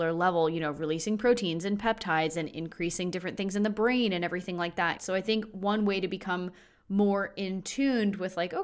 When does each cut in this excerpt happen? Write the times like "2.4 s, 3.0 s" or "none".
5.0 s